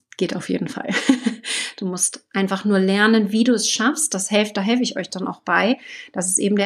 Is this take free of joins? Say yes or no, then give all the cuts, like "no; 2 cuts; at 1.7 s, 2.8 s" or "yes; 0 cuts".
yes; 0 cuts